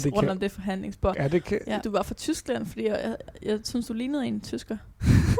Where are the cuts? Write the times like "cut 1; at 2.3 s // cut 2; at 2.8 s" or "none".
cut 1; at 1.8 s